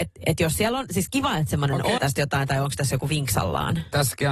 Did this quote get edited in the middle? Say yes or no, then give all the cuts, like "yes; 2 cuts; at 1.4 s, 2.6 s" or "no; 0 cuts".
yes; 1 cut; at 2.0 s